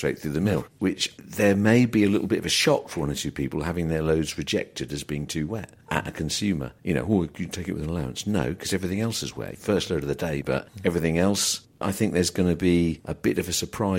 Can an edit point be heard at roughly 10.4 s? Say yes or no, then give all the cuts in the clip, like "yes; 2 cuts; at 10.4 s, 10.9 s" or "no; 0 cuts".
yes; 1 cut; at 10.4 s